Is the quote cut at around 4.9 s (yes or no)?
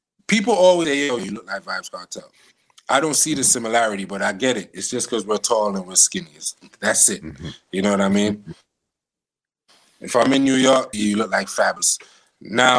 no